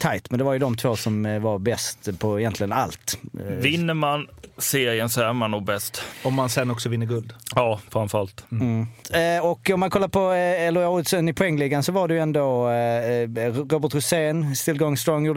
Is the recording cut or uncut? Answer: uncut